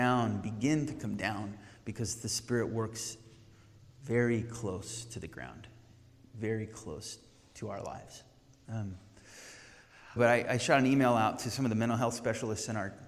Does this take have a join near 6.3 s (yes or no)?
no